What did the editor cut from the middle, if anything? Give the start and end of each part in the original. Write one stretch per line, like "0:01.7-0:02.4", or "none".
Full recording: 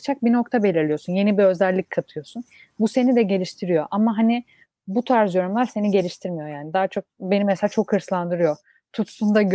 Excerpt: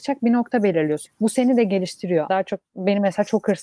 0:01.1-0:02.6
0:03.9-0:06.7